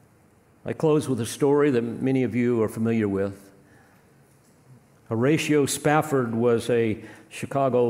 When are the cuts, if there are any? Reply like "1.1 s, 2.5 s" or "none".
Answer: none